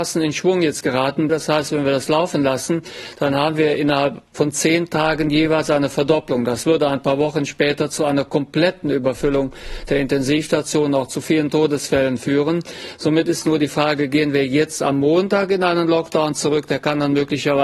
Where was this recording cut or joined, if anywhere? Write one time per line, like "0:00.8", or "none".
0:01.3